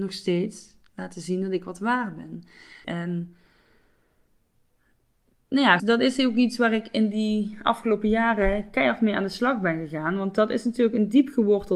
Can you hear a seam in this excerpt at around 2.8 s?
yes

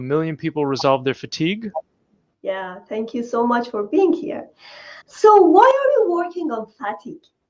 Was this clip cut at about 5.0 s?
yes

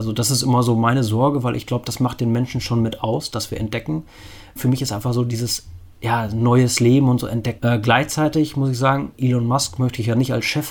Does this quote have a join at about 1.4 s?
no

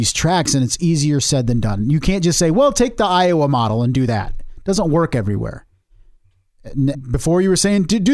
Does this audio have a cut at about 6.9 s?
yes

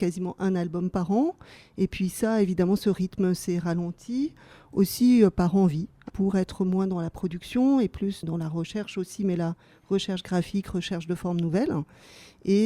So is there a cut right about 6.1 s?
yes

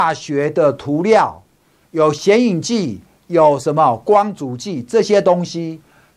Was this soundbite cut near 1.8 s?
yes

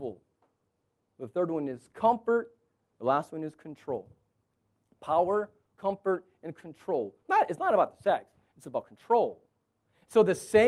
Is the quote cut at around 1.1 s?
no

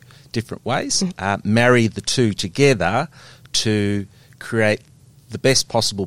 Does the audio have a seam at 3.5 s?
no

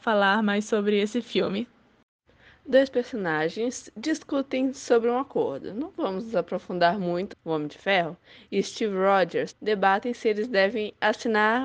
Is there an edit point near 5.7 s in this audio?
no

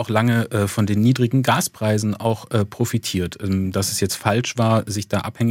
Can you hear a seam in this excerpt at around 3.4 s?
no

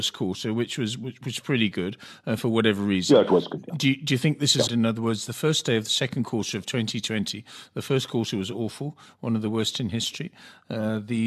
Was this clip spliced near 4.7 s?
yes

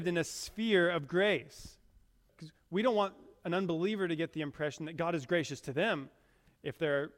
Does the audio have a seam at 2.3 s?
yes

